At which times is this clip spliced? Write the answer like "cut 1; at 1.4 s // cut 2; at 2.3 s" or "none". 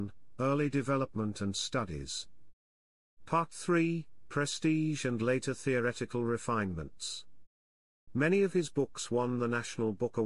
cut 1; at 3.2 s // cut 2; at 8.1 s